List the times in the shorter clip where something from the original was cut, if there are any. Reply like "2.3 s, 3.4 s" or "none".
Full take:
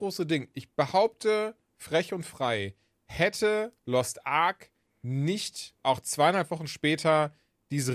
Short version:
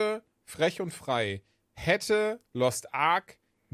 none